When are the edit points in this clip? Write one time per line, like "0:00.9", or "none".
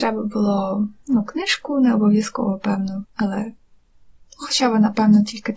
0:03.0